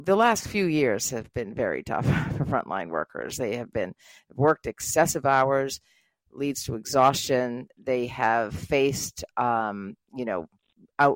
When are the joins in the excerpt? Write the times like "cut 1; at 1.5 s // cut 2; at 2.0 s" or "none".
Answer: none